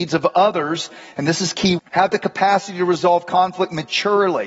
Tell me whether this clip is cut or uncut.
cut